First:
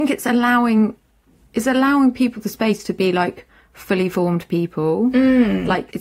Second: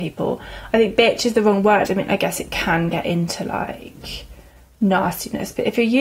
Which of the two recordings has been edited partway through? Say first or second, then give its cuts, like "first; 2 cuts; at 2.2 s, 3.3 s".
second; 1 cut; at 1.8 s